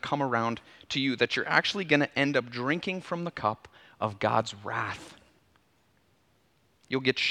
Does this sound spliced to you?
no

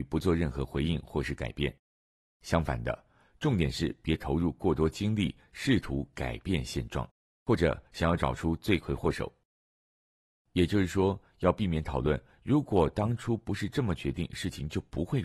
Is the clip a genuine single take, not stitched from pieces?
yes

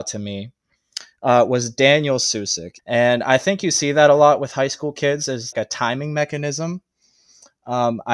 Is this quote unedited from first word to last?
no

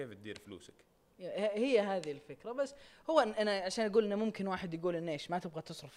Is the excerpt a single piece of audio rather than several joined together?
yes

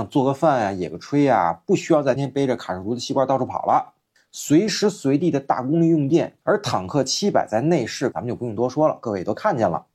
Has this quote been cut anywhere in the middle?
yes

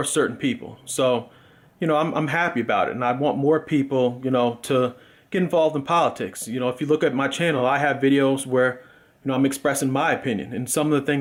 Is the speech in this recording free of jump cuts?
yes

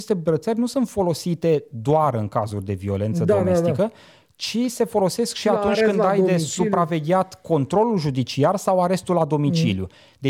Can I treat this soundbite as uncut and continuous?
yes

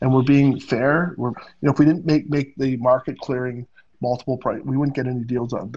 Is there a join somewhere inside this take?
yes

